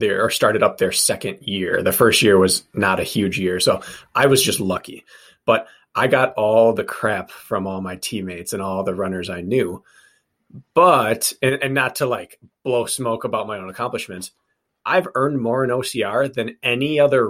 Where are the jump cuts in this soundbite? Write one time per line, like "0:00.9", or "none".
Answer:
none